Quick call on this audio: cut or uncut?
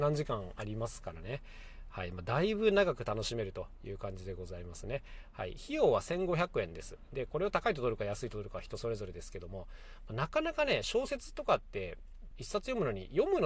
cut